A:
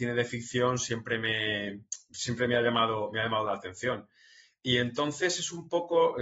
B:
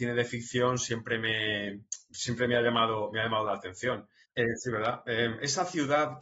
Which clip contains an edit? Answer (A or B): B